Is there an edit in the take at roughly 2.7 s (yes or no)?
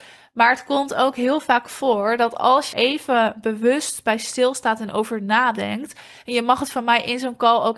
yes